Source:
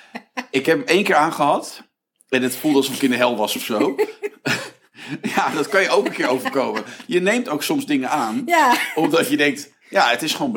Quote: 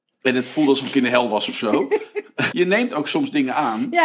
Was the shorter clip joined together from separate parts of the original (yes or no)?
yes